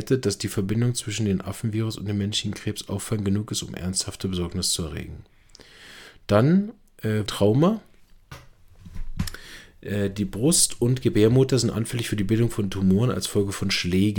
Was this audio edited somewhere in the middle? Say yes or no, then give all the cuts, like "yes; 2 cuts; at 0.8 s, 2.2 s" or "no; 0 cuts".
yes; 1 cut; at 7.3 s